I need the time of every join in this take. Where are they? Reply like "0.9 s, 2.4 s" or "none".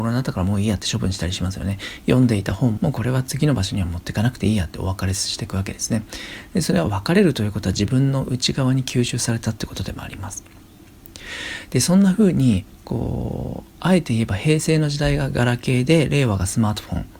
2.8 s